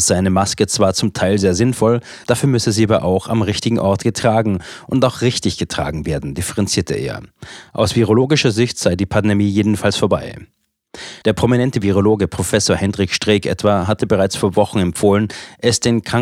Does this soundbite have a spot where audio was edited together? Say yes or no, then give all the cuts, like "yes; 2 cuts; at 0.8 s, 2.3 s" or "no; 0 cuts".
yes; 2 cuts; at 2.2 s, 11.2 s